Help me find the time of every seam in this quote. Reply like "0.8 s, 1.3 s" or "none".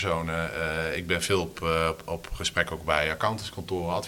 none